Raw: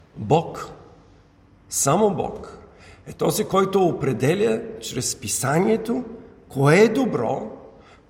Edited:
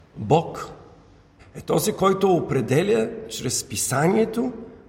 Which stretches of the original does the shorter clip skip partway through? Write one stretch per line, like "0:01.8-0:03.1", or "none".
0:01.4-0:02.9